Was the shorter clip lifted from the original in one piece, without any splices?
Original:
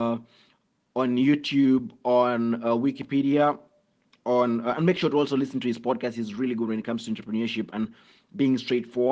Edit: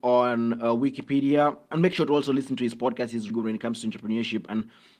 no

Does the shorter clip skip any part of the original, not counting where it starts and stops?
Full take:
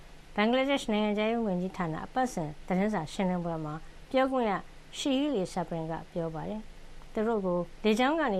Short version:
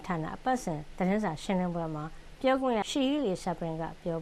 yes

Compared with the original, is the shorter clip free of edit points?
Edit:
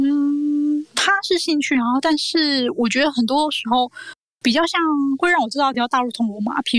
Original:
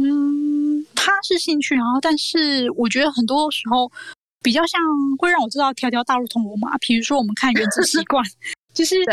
no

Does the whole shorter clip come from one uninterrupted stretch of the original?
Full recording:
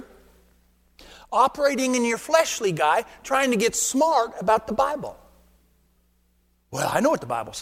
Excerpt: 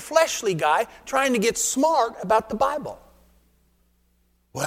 yes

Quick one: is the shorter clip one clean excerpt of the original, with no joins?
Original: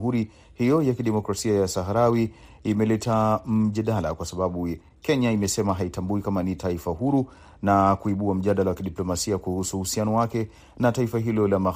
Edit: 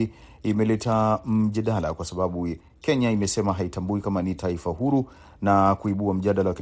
yes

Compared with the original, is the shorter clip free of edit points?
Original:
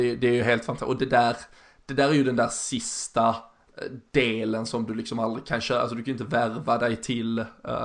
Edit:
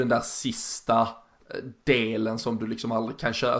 yes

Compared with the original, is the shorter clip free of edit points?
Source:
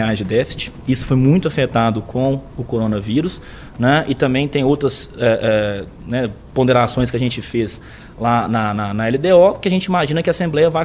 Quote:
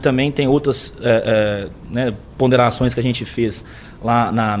yes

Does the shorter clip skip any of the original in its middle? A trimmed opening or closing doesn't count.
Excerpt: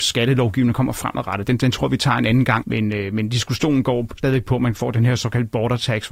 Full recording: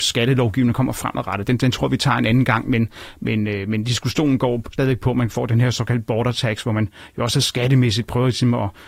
yes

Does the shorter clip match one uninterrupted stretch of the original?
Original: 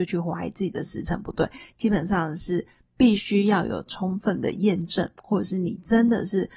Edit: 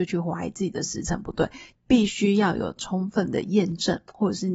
no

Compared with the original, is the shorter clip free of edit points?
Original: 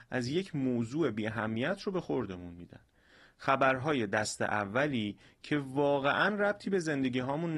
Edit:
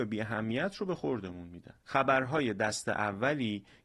no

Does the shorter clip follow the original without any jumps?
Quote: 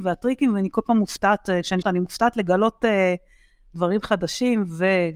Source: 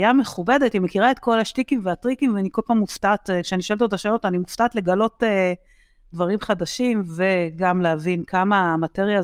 no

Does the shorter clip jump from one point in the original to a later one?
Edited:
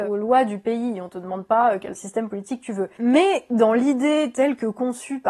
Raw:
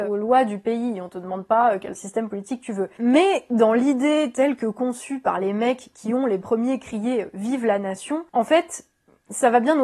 no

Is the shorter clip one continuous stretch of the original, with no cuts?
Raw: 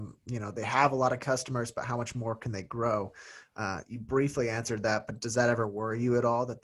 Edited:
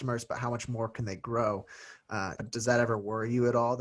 no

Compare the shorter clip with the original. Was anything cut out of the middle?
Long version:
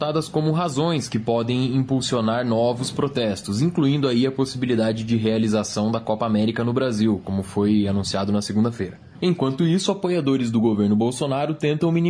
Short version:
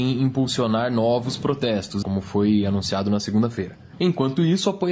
yes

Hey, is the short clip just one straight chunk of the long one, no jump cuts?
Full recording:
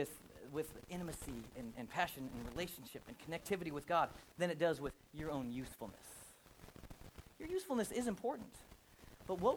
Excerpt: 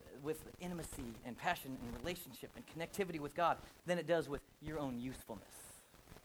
no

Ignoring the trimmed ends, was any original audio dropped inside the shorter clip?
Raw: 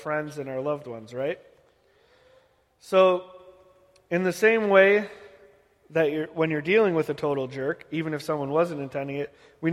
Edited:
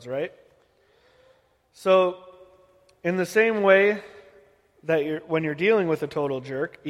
no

